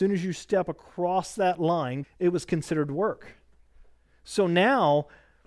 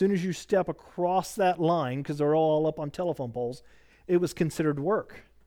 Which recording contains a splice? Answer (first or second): first